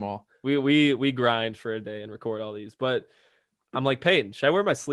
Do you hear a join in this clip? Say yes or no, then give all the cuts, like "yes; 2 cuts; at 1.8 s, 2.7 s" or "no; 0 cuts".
no; 0 cuts